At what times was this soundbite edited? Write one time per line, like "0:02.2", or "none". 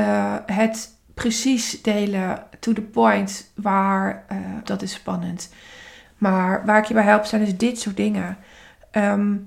0:04.6
0:06.0